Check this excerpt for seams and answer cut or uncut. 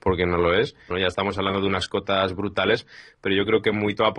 cut